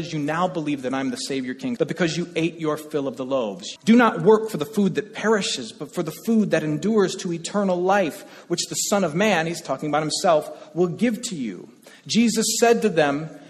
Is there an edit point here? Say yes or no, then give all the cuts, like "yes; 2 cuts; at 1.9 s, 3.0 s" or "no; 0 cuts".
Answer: yes; 2 cuts; at 1.8 s, 3.8 s